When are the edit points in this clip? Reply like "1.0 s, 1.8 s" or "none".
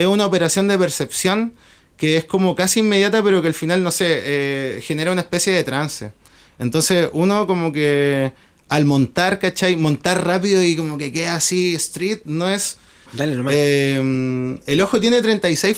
13.1 s